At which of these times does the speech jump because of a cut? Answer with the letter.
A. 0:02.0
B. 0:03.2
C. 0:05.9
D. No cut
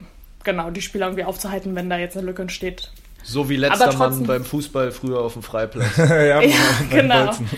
B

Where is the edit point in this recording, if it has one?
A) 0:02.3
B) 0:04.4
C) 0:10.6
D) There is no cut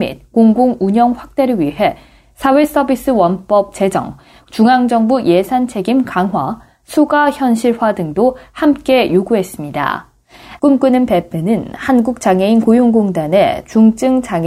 C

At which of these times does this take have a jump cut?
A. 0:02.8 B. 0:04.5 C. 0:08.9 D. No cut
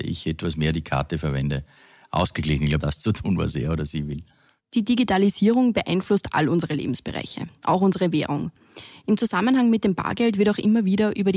A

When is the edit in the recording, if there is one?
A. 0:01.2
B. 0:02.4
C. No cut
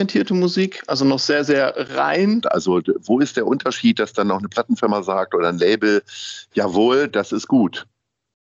B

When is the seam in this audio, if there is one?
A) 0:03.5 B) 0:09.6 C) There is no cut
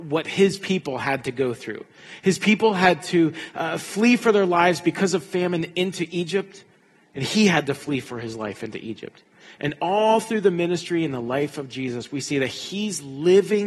B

